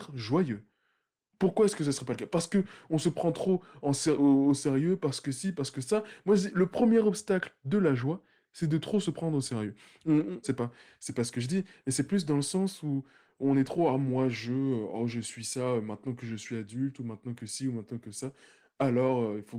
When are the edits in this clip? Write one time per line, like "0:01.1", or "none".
0:10.4